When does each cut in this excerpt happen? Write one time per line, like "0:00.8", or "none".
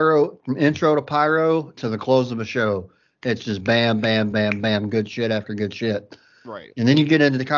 0:04.3